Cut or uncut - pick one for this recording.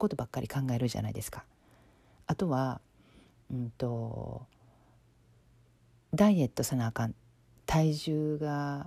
uncut